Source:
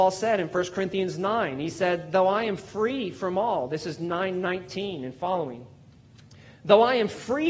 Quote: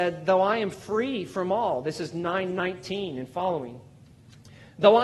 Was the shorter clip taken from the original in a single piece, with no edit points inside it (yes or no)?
yes